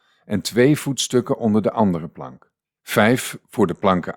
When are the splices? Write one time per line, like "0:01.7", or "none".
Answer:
0:02.8